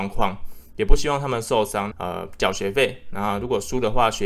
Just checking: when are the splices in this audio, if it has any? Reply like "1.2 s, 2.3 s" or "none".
1.9 s

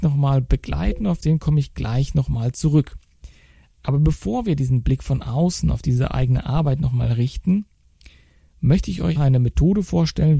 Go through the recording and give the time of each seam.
9.2 s

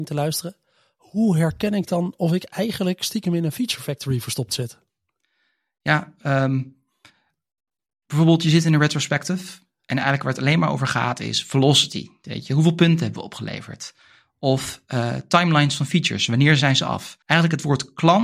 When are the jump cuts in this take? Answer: 17.2 s

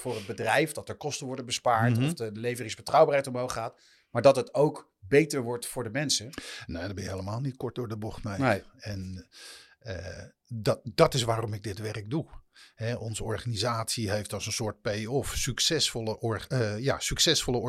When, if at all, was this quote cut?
none

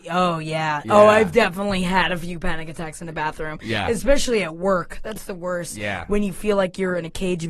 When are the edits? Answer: none

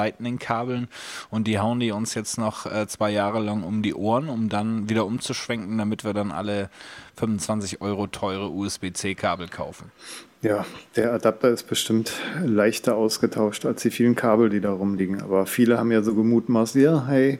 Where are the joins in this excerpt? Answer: none

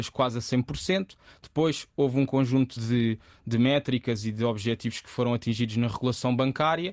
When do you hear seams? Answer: none

